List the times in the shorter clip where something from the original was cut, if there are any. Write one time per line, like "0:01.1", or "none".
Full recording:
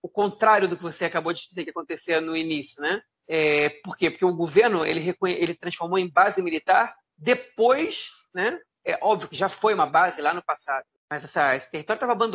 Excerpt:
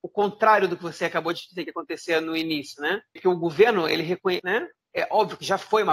0:03.2
0:04.4